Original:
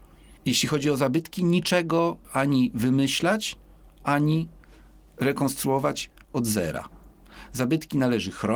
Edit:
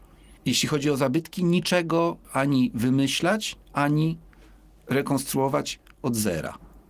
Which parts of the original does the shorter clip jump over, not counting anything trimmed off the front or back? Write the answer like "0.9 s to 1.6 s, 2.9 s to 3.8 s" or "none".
3.6 s to 3.9 s